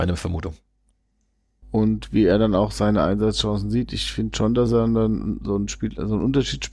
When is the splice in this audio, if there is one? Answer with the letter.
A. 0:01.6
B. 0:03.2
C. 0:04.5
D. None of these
A